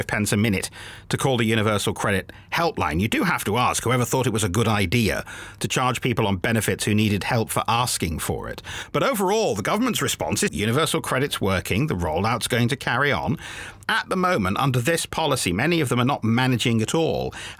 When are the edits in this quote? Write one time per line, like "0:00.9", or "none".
0:10.5
0:13.8